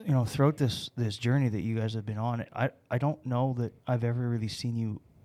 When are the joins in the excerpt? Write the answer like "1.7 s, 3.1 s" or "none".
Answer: 3.8 s

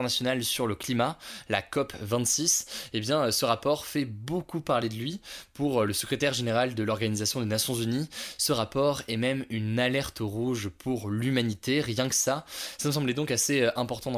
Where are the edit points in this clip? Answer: none

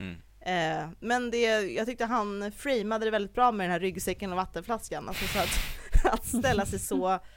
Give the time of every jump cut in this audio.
none

